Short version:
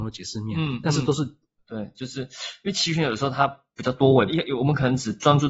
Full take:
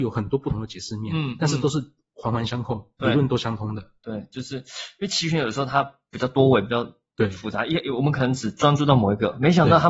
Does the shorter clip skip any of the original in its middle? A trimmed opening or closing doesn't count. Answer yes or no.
yes